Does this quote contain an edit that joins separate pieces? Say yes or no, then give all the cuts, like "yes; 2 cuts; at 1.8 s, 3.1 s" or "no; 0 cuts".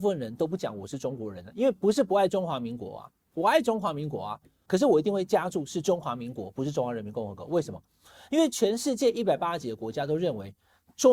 yes; 1 cut; at 4.7 s